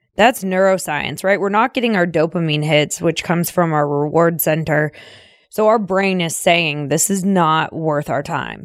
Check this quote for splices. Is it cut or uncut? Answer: uncut